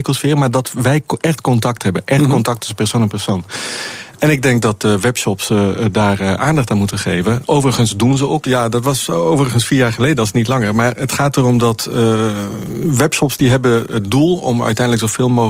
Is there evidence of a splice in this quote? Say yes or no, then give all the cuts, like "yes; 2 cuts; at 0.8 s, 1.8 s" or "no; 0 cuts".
yes; 1 cut; at 8.4 s